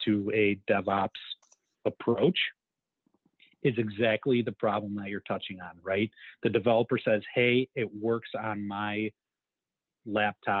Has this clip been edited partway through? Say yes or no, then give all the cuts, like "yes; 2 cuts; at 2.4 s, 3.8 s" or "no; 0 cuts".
no; 0 cuts